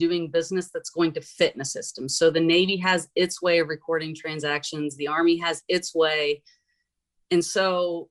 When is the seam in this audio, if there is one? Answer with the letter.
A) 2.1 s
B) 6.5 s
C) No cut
C